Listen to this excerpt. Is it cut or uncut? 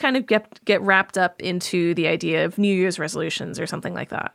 uncut